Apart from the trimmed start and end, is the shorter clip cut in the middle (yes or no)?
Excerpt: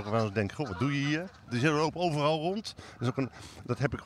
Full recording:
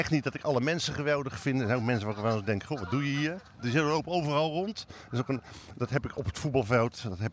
no